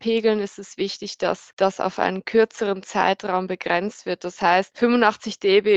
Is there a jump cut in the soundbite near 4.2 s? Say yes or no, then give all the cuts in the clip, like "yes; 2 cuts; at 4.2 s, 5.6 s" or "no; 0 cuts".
no; 1 cut; at 1.5 s